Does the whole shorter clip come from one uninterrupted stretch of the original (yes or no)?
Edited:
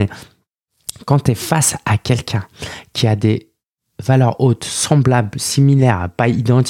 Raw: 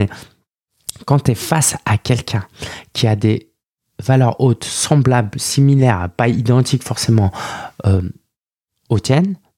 yes